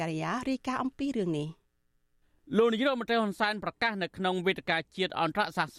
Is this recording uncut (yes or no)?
yes